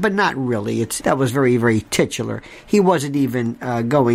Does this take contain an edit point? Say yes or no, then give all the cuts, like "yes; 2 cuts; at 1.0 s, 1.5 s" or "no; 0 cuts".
yes; 1 cut; at 1.0 s